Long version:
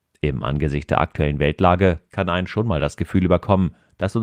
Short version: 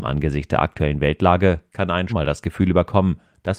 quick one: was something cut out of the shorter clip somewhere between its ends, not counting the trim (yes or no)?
yes